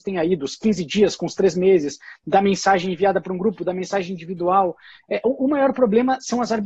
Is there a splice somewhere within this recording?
no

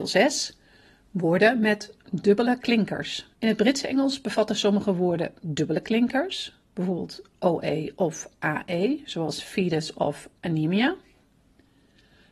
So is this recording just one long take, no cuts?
no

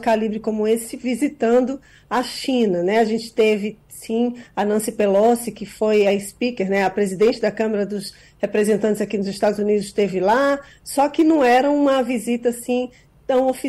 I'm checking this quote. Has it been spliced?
no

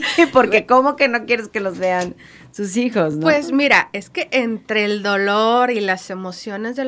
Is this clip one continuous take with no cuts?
yes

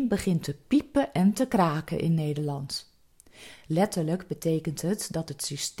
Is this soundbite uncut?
yes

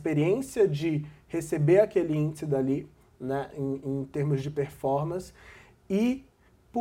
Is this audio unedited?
yes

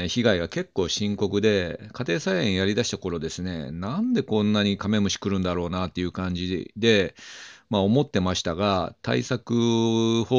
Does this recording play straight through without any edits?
yes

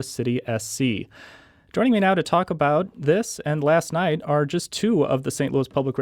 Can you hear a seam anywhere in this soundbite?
no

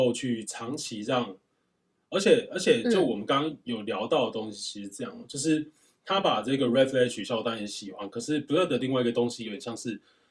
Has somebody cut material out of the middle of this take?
no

